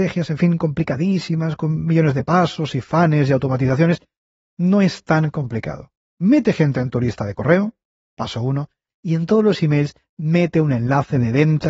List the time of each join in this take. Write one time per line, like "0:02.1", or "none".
0:08.9

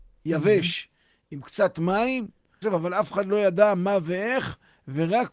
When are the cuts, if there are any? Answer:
0:02.6

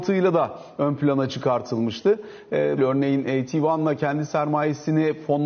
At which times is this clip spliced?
0:02.8

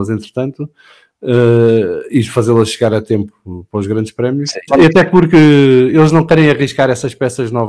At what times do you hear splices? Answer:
0:04.7

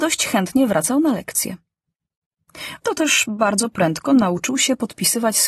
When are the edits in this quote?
0:02.8

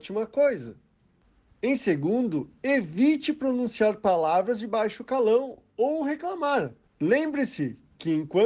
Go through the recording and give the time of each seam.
0:06.9

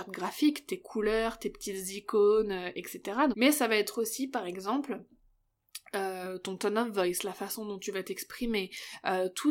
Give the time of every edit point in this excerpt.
0:03.3

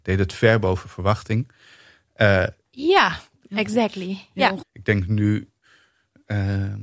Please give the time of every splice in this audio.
0:02.6
0:04.6

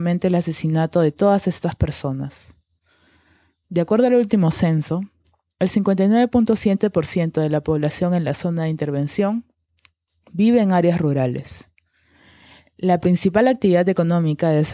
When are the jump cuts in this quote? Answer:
0:03.6

